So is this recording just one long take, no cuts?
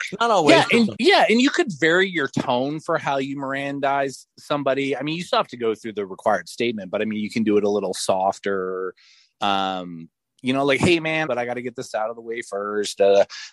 no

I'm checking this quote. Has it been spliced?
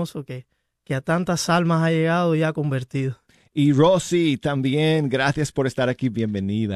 no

